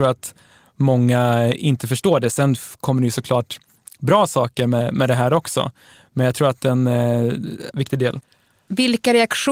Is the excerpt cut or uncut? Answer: cut